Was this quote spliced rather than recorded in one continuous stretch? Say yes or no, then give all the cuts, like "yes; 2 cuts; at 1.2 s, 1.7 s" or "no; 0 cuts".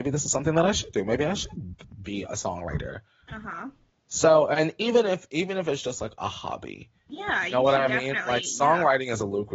no; 0 cuts